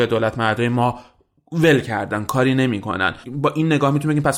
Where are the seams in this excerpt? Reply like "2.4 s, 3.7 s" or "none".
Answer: none